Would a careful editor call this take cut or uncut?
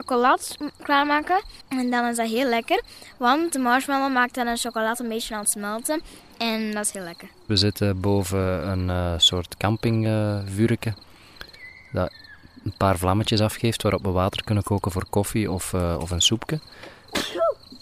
cut